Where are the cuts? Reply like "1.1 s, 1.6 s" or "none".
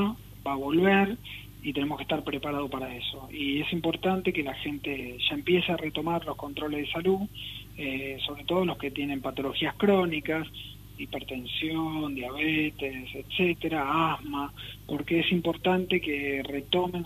none